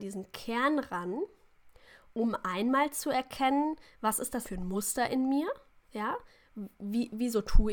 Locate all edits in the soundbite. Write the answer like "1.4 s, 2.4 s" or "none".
4.4 s